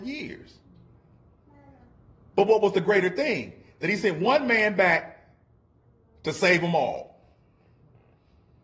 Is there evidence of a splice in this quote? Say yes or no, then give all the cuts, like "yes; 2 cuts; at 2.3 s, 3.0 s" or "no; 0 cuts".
no; 0 cuts